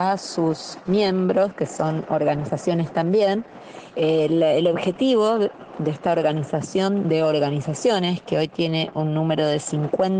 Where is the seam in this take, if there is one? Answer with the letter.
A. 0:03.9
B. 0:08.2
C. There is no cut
A